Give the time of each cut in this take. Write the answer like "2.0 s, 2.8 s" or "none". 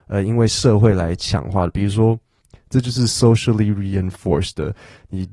2.4 s